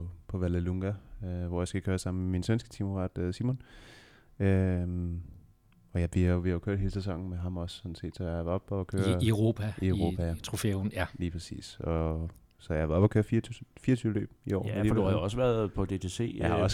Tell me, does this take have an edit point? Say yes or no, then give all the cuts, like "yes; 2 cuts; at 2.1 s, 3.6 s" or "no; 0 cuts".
no; 0 cuts